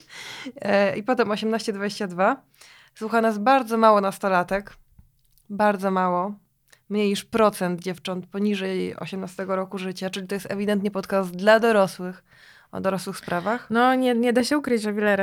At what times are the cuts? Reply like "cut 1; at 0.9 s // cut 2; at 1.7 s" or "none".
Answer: none

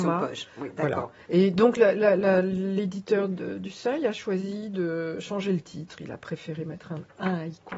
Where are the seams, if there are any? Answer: none

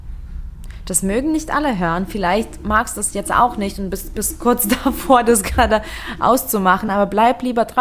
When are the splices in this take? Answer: none

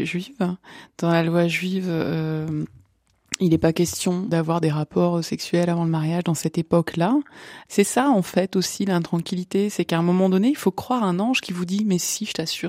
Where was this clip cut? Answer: cut 1; at 4.3 s // cut 2; at 7.7 s

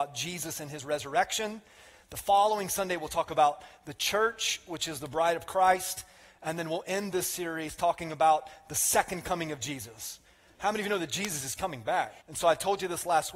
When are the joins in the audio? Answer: cut 1; at 12.2 s

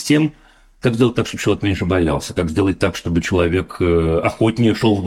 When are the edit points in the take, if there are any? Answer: none

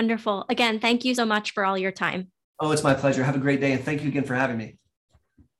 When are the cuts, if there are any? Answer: cut 1; at 1.2 s

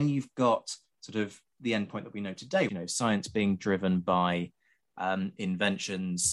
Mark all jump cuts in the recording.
cut 1; at 2.7 s

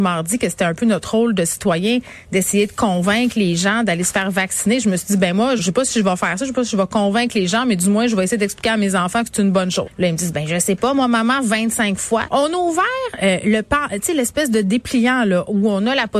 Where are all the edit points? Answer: cut 1; at 5.6 s // cut 2; at 9.9 s // cut 3; at 12.3 s

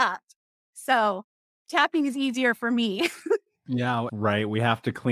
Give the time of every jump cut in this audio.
cut 1; at 4.1 s

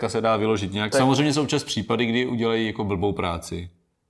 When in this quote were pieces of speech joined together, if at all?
cut 1; at 0.9 s

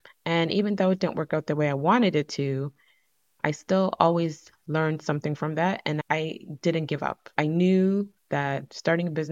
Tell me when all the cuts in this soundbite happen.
none

